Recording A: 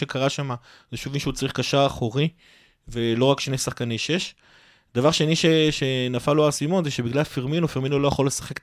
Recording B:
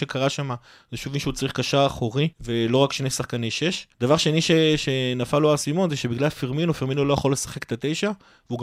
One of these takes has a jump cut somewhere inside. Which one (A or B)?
B